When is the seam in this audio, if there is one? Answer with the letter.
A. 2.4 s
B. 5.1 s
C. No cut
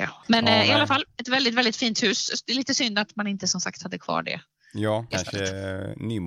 B